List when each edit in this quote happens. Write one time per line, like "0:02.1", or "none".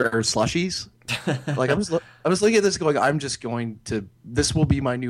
none